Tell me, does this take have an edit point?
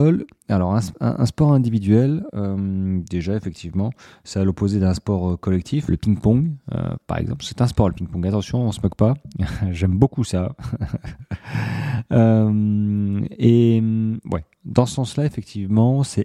yes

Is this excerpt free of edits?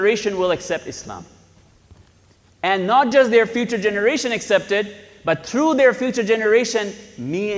yes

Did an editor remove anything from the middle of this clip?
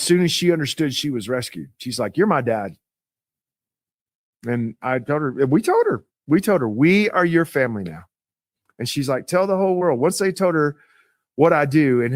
no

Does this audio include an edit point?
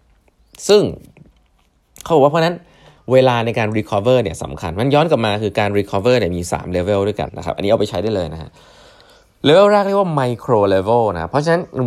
yes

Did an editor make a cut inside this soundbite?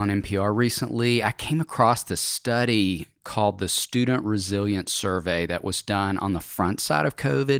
no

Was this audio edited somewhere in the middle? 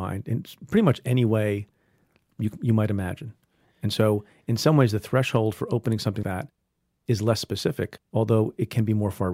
yes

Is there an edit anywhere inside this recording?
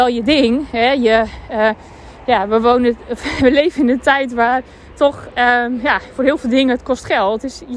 no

